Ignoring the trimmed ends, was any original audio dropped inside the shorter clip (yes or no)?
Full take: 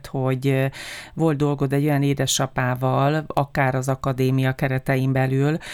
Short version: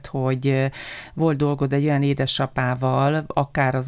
no